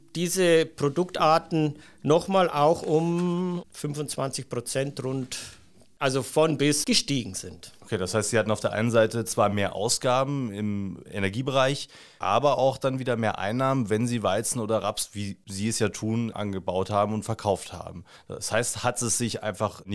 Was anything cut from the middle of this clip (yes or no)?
yes